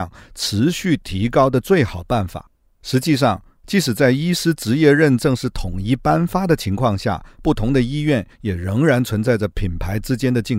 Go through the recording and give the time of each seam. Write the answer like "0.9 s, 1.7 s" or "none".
none